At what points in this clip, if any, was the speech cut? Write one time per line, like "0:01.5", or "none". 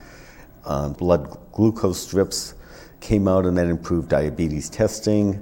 0:00.9